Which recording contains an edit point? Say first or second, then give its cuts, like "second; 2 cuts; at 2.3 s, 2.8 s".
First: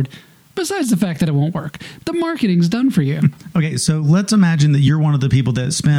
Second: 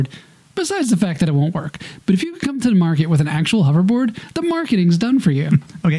first; 1 cut; at 2.0 s